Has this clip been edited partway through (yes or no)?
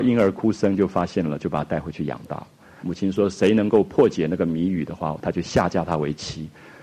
yes